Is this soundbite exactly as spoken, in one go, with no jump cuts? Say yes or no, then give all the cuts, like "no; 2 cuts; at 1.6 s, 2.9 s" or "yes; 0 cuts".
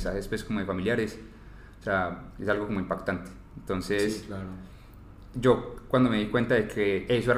yes; 0 cuts